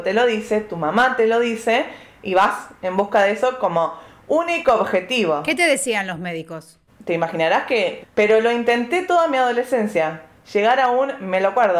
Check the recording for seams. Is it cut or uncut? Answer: cut